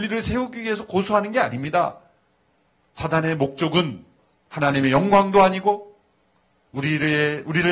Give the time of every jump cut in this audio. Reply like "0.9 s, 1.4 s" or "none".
none